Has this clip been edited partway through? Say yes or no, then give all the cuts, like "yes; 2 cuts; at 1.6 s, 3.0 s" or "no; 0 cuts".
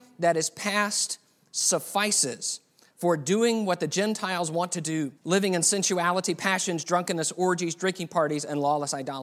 yes; 1 cut; at 5.2 s